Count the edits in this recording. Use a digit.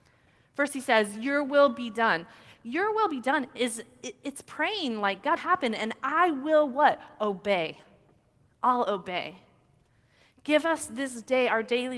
1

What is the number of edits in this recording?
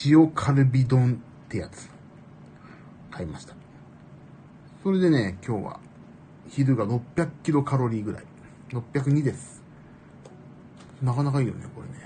0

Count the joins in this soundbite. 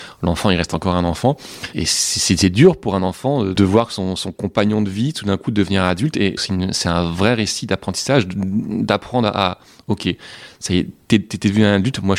1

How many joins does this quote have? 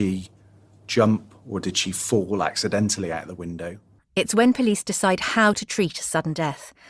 1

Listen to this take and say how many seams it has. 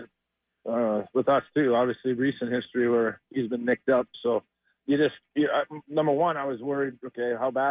1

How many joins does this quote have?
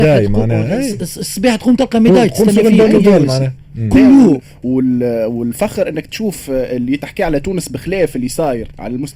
0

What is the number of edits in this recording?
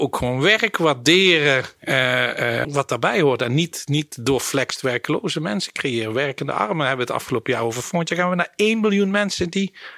1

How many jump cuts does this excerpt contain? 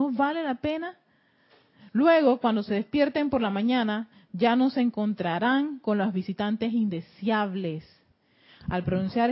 0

